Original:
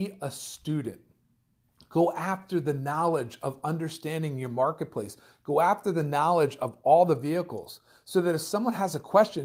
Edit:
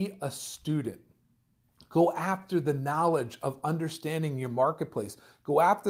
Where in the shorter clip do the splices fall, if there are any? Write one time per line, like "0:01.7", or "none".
none